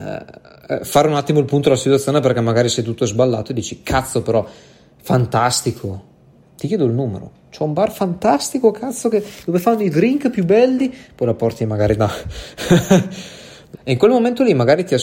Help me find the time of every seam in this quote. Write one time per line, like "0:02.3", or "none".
0:06.4
0:13.7